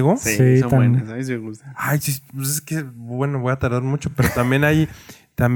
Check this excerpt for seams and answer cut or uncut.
uncut